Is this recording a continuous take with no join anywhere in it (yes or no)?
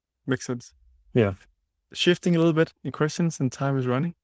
yes